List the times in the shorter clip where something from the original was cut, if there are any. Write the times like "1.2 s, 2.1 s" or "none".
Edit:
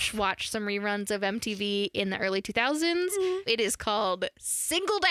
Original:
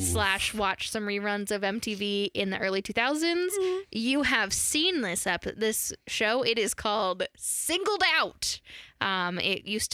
3.5 s